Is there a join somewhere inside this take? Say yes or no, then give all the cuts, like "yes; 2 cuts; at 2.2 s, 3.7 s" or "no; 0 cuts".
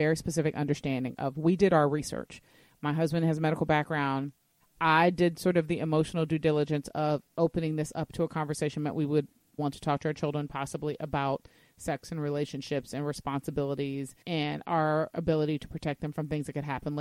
yes; 3 cuts; at 4.6 s, 9.6 s, 14.2 s